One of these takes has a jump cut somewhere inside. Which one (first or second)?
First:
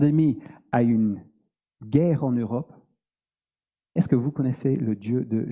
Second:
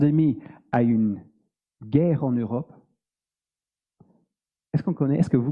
first